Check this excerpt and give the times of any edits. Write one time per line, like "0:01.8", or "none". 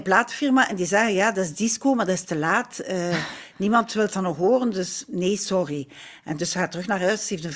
none